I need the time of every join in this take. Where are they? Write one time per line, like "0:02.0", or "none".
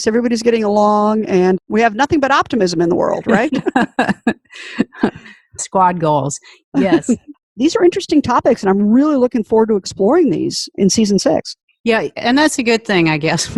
0:07.3